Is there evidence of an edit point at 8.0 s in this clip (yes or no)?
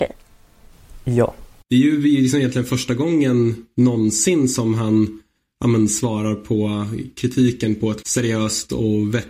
yes